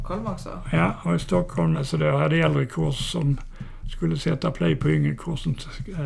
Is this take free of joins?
no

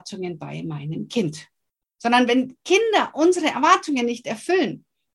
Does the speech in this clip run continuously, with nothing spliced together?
no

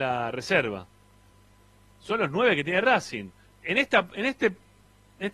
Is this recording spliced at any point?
yes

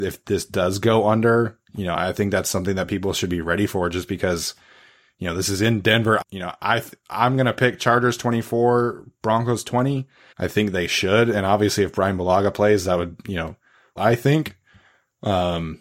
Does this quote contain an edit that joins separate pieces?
yes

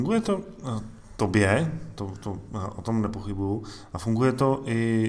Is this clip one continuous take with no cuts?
yes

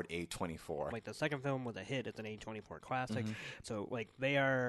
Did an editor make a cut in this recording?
yes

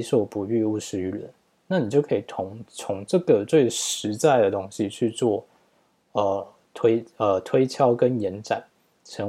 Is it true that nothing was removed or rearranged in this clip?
yes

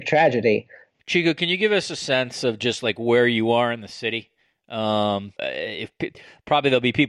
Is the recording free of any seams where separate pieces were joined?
no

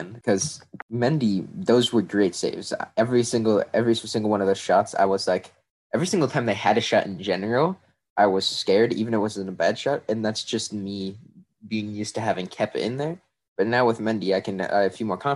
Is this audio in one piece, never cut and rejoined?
yes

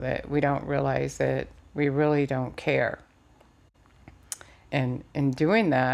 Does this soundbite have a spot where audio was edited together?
yes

